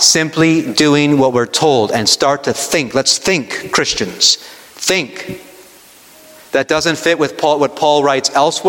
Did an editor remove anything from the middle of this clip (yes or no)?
no